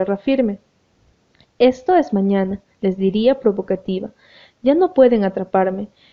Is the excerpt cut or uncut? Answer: uncut